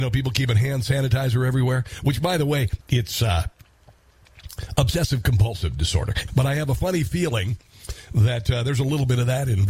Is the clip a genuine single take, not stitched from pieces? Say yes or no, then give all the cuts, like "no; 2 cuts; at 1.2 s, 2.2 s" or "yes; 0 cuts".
no; 2 cuts; at 2.8 s, 6.3 s